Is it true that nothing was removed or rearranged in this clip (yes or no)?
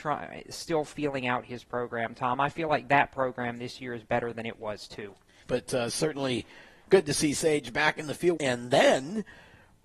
no